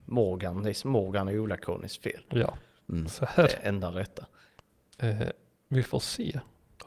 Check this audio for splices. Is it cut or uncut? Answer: uncut